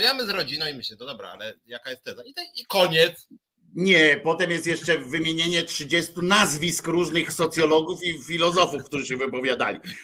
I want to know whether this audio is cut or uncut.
uncut